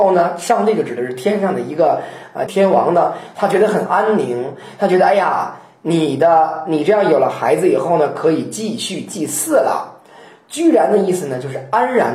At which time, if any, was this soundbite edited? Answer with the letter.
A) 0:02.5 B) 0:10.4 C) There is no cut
A